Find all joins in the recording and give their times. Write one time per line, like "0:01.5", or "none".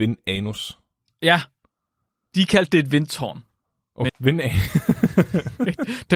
0:04.1